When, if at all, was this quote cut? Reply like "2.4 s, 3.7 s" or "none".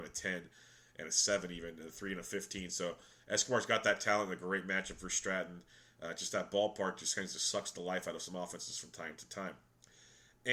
none